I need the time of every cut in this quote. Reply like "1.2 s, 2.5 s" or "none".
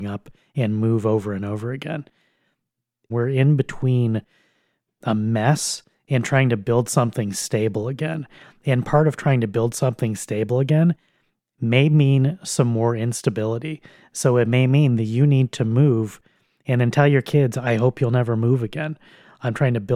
3.1 s